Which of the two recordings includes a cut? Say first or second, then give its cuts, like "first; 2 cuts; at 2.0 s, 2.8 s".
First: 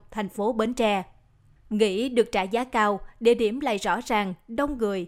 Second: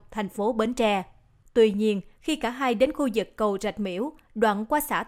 second; 1 cut; at 1.4 s